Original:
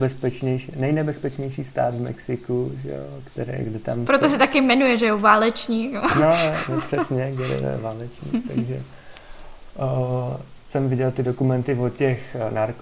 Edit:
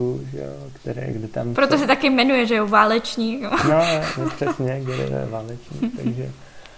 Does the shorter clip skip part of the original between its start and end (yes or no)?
no